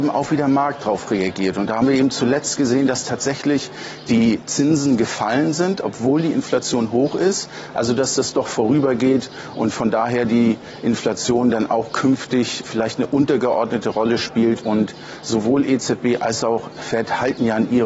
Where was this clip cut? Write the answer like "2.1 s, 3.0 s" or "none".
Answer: 7.7 s, 12.6 s